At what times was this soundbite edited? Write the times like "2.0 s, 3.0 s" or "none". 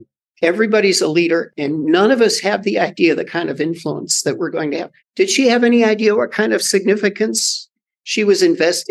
5.0 s